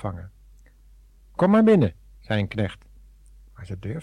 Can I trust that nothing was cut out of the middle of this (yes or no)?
yes